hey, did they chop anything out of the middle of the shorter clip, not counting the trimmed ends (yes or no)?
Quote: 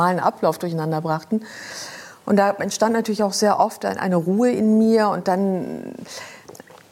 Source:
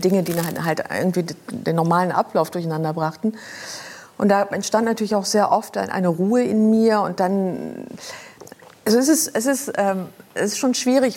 no